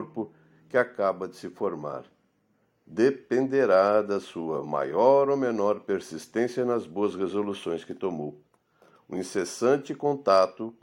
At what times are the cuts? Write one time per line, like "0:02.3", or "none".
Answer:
0:02.6